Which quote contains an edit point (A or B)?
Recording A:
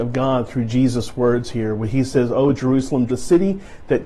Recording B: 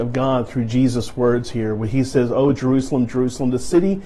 A